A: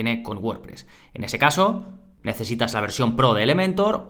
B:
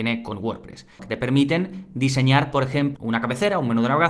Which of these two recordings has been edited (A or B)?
B